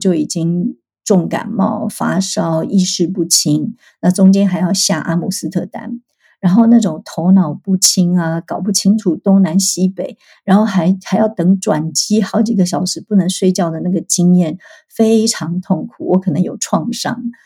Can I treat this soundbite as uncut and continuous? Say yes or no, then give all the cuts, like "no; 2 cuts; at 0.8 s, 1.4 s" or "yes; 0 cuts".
yes; 0 cuts